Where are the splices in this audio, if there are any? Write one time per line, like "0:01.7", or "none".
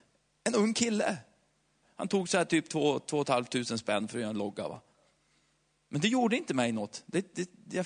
0:01.8